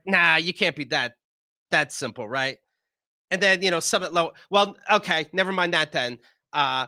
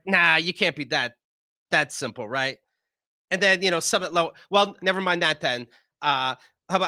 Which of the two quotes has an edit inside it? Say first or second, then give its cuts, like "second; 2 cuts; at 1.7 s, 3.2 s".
second; 1 cut; at 4.8 s